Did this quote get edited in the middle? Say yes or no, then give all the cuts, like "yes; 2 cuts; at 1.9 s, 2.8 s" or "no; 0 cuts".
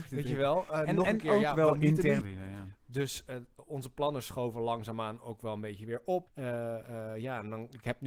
yes; 2 cuts; at 2.2 s, 6.3 s